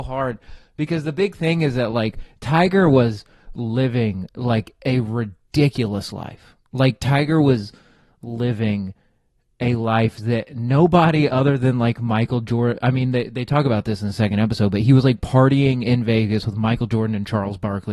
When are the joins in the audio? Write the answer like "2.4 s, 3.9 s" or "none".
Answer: none